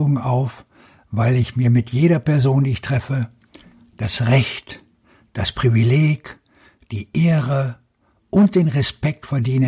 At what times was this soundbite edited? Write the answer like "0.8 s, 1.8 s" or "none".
none